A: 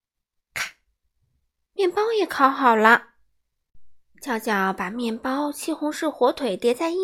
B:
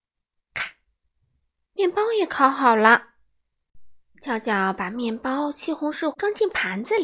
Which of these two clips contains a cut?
B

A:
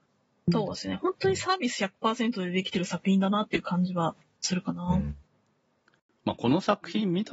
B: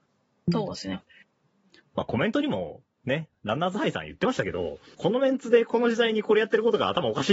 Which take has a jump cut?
B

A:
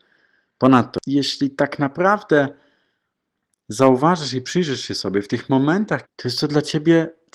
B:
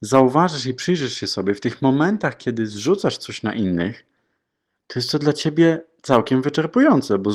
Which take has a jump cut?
A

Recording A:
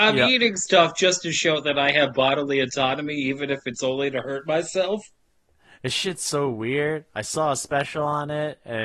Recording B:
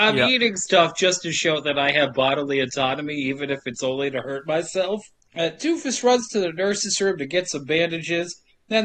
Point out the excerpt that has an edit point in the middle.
B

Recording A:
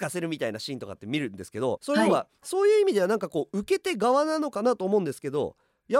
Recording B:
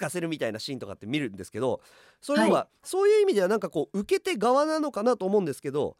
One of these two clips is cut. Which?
A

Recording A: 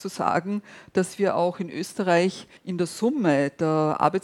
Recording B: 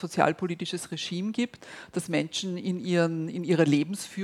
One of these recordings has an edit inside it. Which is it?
A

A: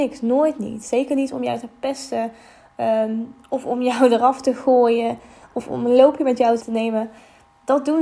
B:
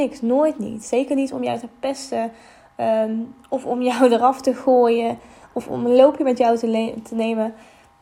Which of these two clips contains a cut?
A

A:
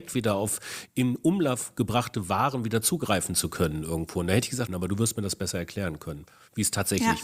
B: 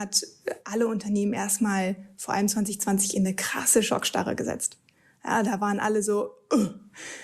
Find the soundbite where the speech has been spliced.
A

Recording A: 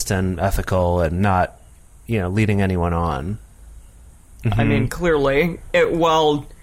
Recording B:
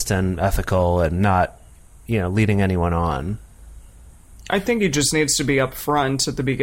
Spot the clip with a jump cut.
A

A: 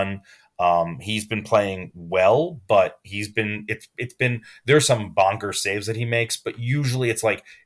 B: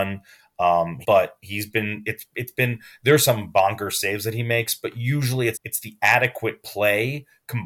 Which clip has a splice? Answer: B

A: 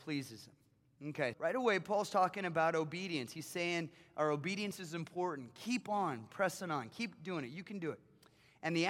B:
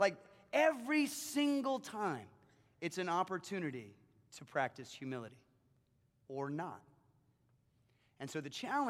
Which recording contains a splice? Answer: A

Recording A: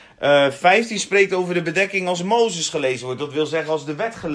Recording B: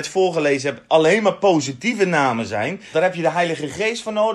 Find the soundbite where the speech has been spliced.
B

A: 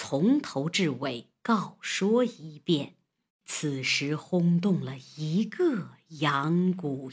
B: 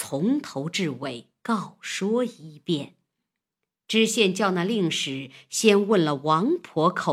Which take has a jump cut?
A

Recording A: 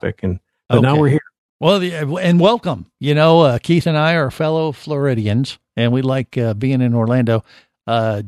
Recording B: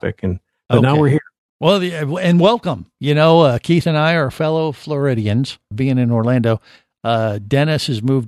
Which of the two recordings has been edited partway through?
B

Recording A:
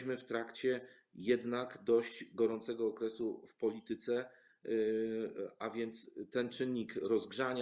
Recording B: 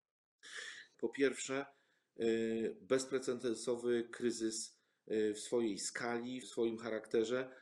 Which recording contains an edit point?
B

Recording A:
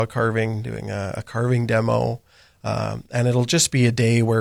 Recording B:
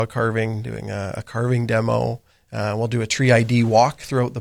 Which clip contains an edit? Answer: B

